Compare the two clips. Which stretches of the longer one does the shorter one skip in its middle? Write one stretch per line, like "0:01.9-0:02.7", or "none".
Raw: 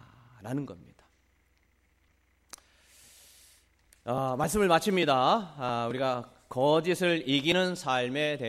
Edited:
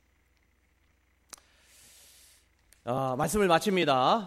none

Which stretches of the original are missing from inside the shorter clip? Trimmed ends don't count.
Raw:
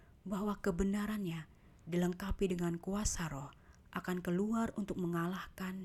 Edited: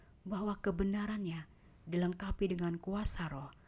none

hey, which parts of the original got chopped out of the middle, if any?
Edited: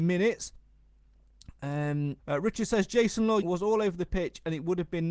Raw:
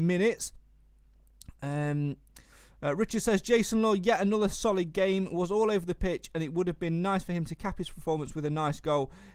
0:02.2-0:02.7
0:04.0-0:05.3

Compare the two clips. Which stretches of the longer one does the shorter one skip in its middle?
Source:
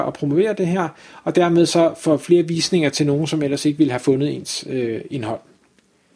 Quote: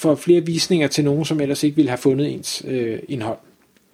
none

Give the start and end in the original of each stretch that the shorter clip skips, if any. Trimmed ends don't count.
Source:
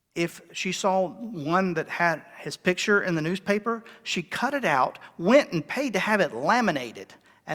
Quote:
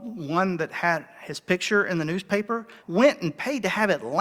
0:04.0-0:05.1

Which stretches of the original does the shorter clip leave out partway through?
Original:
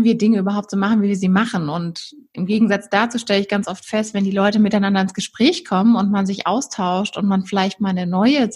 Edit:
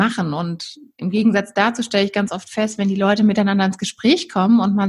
none

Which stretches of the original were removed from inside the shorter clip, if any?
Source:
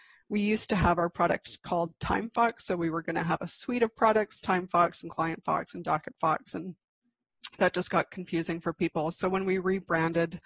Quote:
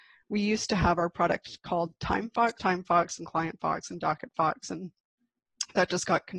0:02.6-0:04.4

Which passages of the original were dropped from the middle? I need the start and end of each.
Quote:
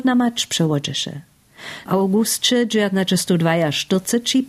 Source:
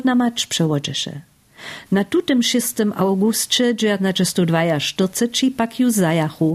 0:01.9-0:02.9

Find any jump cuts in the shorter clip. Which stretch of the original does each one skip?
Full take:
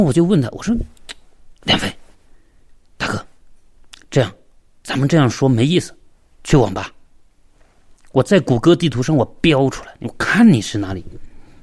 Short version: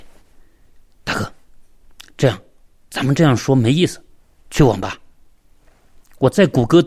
none

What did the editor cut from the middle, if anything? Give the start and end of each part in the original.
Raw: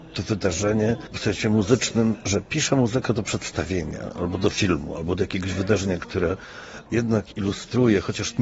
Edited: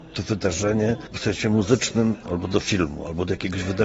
0:02.2-0:04.1

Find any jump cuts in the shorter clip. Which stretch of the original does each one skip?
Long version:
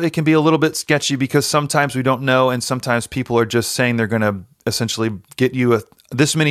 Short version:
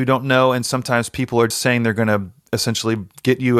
0:03.5-0:03.6

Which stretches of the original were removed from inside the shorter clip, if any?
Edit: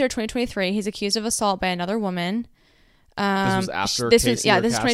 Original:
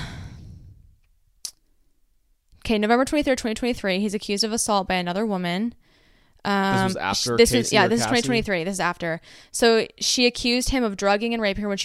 none

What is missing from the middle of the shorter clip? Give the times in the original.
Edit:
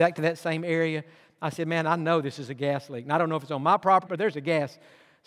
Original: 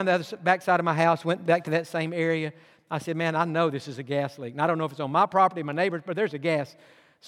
0:05.5-0:06.0

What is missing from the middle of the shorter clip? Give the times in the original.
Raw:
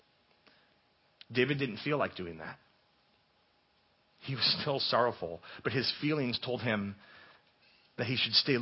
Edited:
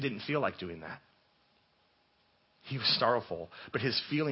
0:04.6-0:04.9

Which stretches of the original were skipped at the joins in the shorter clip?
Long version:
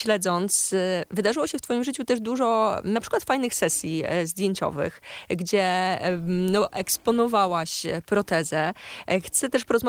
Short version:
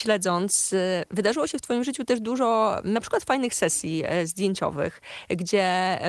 none

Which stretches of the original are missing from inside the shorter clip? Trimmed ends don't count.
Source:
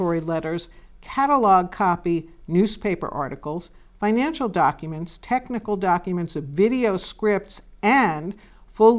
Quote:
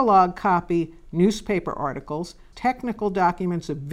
0:03.9-0:05.2

